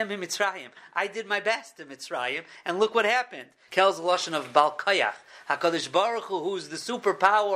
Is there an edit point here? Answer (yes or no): yes